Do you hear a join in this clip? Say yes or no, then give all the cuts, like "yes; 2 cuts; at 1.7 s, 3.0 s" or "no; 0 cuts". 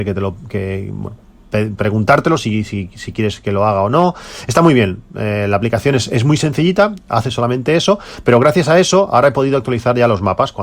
no; 0 cuts